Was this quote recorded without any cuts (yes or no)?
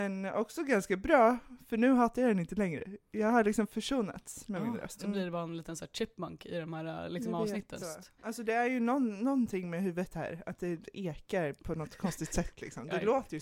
no